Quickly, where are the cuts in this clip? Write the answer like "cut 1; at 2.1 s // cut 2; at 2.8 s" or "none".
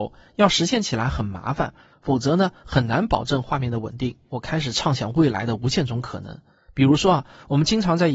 cut 1; at 1.9 s // cut 2; at 4.3 s